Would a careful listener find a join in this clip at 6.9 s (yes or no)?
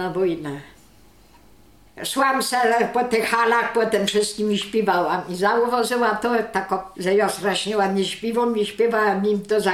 yes